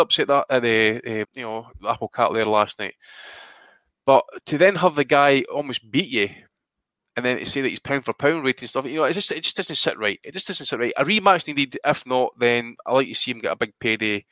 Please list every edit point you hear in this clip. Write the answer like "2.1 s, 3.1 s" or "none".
1.2 s